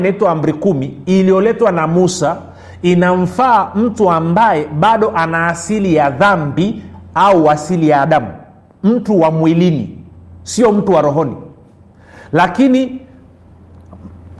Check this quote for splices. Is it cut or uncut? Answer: uncut